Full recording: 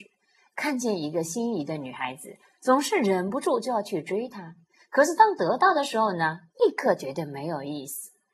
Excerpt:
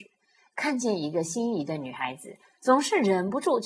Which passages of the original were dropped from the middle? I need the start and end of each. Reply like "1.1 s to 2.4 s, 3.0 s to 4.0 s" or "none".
none